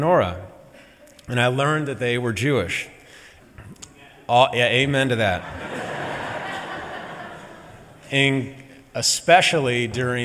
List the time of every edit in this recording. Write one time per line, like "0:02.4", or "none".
0:03.4

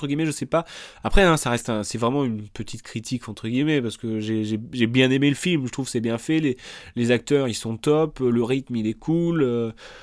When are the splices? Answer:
none

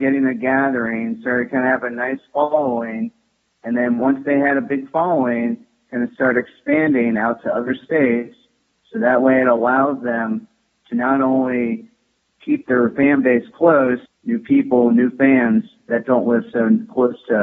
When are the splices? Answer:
0:14.1

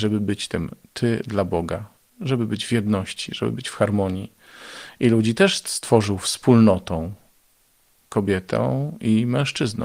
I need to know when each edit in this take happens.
none

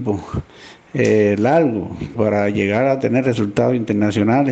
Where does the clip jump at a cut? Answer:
0:02.1

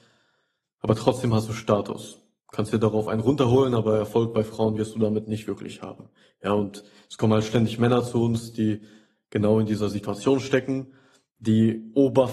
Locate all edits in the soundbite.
none

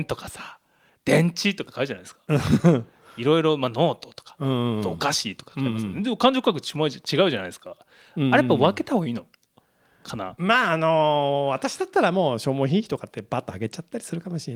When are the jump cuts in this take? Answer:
none

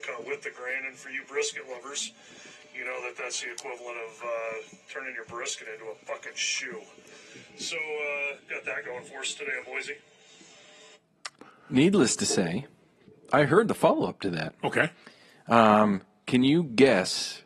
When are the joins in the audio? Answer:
0:08.4

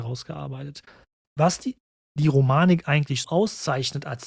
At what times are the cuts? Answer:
0:01.2
0:03.2

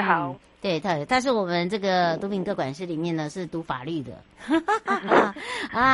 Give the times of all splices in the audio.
0:01.1

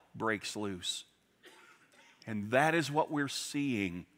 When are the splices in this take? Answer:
none

